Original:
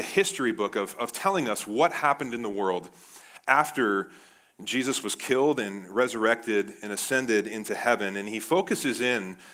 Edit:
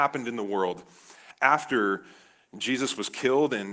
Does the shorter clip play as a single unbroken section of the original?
yes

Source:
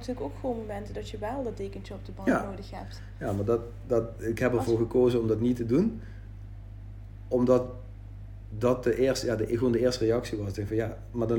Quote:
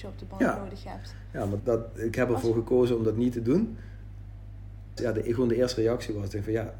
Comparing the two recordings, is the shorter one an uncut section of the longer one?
no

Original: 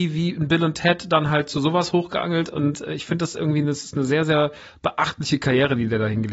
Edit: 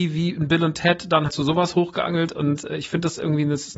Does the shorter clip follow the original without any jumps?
no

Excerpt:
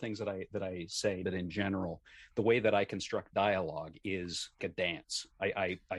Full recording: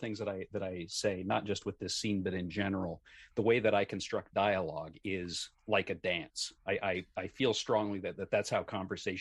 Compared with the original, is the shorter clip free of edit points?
no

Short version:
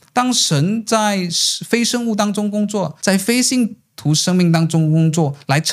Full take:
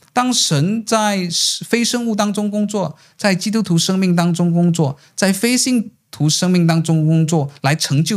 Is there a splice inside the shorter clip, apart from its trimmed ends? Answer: yes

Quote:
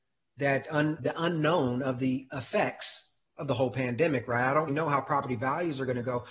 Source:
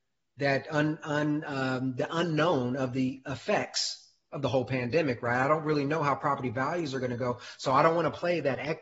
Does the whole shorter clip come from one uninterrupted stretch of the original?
no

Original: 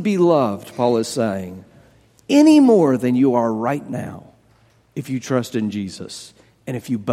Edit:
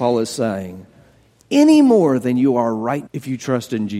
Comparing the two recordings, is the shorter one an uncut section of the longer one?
no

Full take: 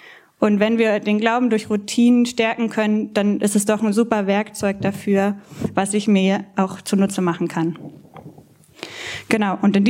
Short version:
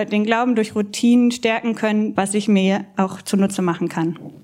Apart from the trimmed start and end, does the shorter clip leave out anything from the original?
yes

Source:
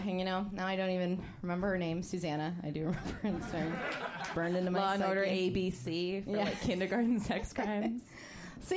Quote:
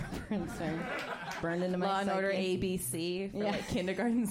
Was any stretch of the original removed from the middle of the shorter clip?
no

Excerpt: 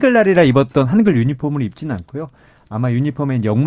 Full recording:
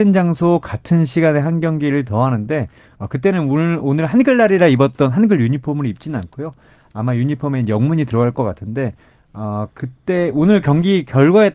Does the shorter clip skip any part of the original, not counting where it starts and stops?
no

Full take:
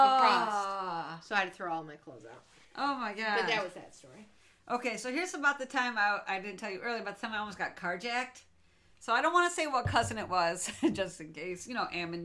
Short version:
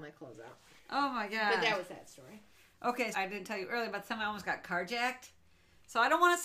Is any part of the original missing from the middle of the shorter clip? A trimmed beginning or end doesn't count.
yes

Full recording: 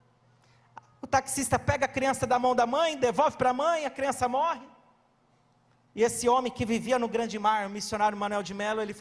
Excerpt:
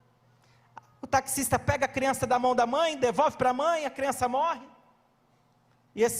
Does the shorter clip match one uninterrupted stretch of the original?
yes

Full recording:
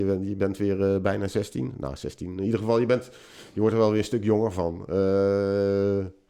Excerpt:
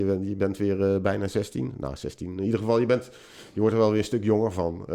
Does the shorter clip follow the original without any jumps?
yes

